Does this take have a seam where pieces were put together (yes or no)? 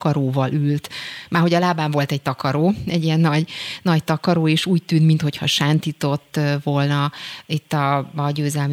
no